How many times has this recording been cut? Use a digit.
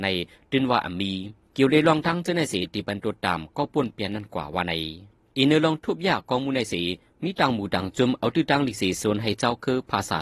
1